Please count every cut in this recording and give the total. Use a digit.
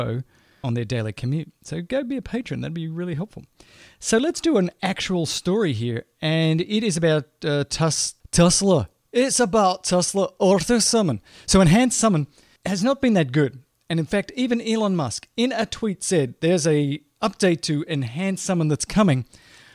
1